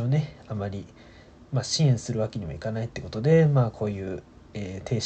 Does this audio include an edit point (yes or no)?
no